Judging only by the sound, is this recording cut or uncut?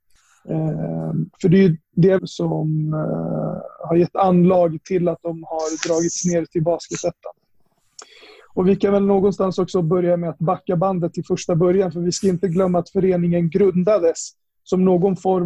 cut